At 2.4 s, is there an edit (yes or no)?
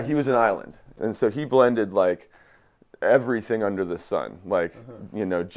no